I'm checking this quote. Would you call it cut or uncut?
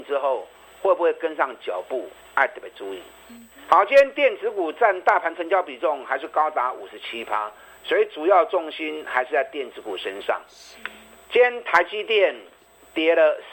uncut